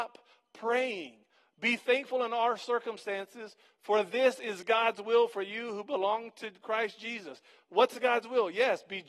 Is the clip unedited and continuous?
yes; 0 cuts

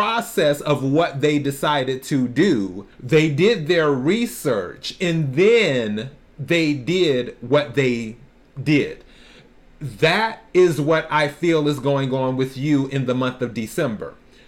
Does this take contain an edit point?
yes; 1 cut; at 2.9 s

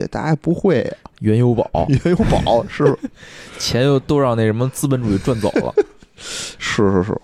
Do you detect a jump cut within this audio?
no; 0 cuts

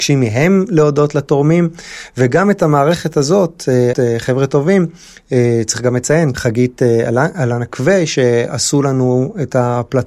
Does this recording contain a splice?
yes; 2 cuts; at 3.9 s, 6.3 s

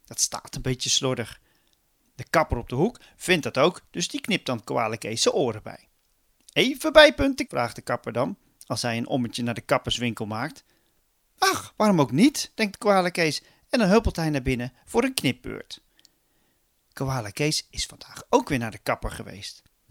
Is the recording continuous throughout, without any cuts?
no; 1 cut; at 7.5 s

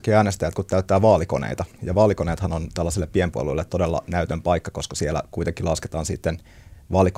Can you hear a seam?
no; 0 cuts

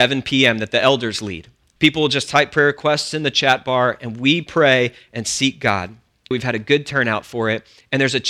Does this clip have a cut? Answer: yes; 2 cuts; at 1.8 s, 6.3 s

